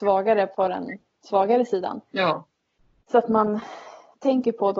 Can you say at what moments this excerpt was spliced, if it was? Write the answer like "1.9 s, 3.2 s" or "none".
2.1 s